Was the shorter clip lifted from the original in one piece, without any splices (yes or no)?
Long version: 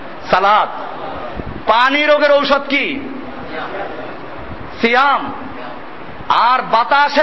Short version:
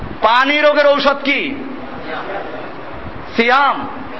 yes